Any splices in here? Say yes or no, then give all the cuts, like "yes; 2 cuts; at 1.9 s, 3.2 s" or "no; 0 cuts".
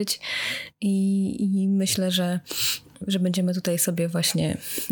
no; 0 cuts